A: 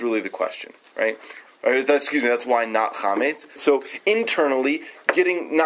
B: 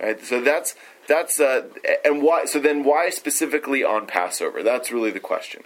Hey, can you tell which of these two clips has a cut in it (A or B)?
A